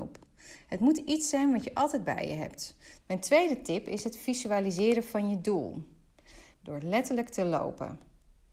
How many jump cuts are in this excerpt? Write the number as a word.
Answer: two